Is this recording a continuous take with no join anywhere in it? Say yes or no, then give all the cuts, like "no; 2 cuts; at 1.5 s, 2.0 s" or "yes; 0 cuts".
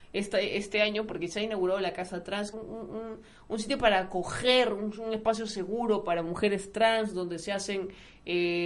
no; 1 cut; at 2.5 s